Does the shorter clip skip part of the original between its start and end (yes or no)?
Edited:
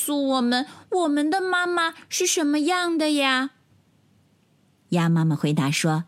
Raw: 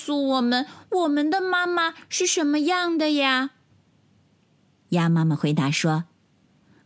no